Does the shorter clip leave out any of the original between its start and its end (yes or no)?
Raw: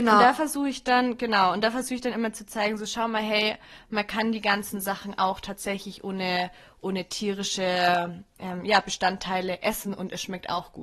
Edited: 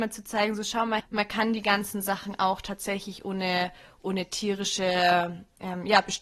yes